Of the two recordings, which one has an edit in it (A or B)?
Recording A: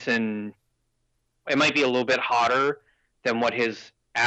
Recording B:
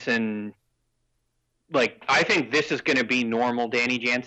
A